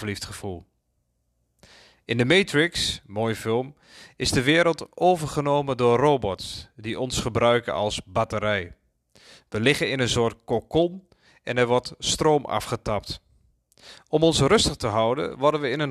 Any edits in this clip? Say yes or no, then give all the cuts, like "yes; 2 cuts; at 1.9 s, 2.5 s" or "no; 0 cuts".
no; 0 cuts